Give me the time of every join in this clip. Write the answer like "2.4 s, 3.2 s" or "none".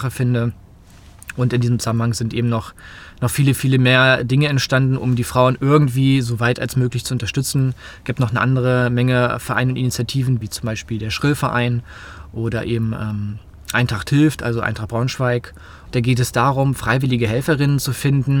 10.4 s, 15.9 s